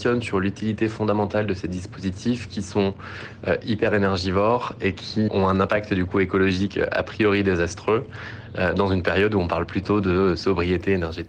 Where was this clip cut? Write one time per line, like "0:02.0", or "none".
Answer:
0:05.3